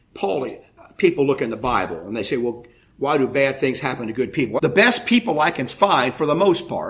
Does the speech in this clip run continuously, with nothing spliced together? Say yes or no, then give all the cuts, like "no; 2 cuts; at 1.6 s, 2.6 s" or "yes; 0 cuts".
no; 1 cut; at 4.6 s